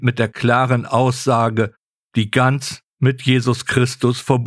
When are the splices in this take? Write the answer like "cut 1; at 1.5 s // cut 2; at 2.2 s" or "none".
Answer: cut 1; at 2.1 s